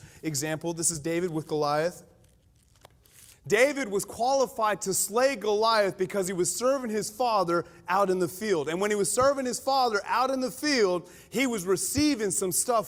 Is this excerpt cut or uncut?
cut